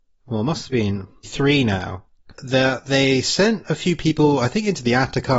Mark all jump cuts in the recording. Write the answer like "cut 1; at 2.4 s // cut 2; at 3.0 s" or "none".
cut 1; at 1.2 s // cut 2; at 2.3 s